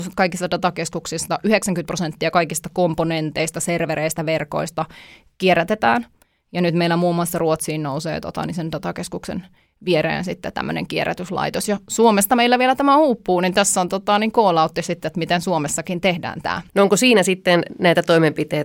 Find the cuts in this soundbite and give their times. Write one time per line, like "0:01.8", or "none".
0:16.7